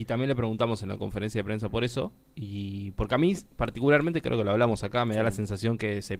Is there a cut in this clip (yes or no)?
no